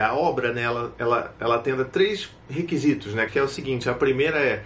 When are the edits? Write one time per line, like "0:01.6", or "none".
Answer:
0:03.3